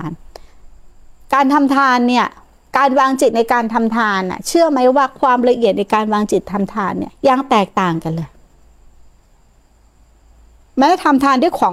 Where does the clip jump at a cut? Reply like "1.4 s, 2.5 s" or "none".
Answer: 7.1 s